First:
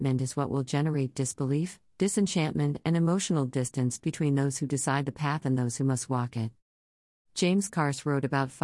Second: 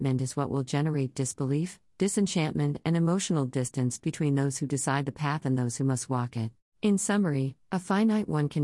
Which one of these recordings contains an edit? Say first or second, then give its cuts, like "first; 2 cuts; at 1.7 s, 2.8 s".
second; 1 cut; at 6.7 s